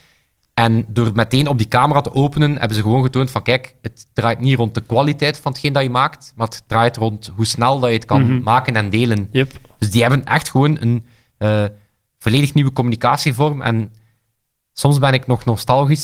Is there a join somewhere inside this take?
no; 0 cuts

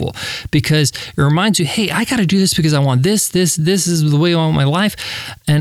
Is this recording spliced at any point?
no; 0 cuts

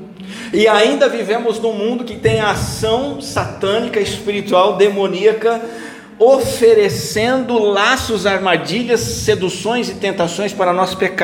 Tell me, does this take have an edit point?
no; 0 cuts

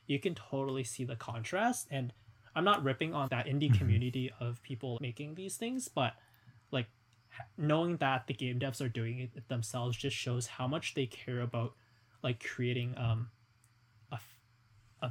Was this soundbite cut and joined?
yes; 2 cuts; at 3.3 s, 5.0 s

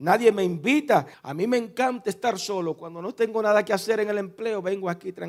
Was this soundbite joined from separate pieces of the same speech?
yes; 1 cut; at 1.1 s

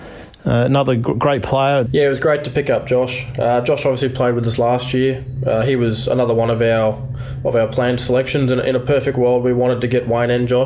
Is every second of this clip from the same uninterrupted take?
no; 1 cut; at 1.9 s

